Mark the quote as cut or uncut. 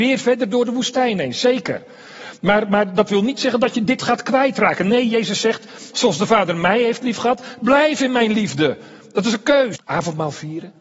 cut